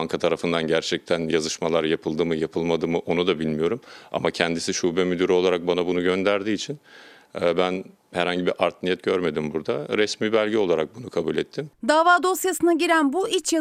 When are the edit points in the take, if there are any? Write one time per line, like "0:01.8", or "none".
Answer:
none